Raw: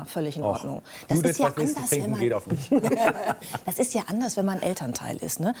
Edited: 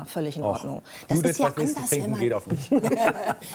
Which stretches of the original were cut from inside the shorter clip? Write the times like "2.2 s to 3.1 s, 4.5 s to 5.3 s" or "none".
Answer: none